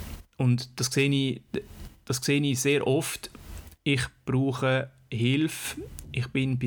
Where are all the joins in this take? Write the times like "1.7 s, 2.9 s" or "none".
3.8 s